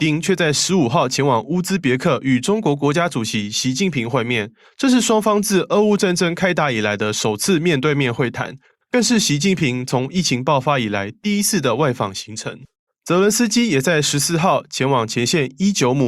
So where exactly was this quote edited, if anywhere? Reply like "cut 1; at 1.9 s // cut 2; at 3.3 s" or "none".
cut 1; at 12.9 s

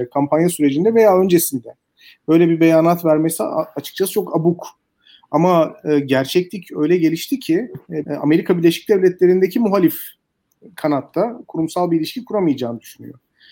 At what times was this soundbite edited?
cut 1; at 8.1 s

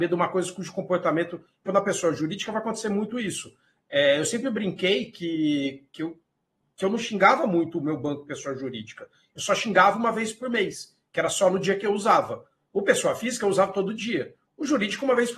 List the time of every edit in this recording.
cut 1; at 1.7 s

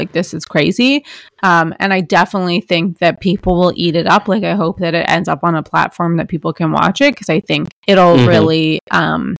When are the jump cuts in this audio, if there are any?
cut 1; at 7.8 s

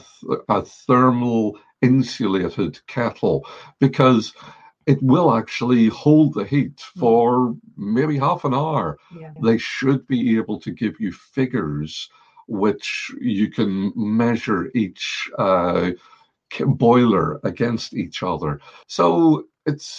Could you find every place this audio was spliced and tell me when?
cut 1; at 9.4 s // cut 2; at 18.8 s

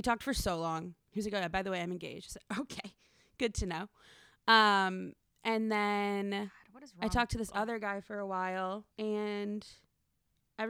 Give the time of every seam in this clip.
cut 1; at 8.9 s

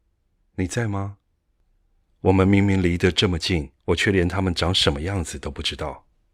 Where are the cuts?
cut 1; at 2.0 s // cut 2; at 3.8 s

